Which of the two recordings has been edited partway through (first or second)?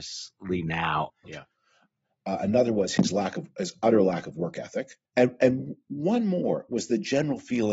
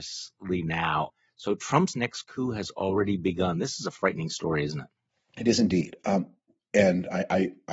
first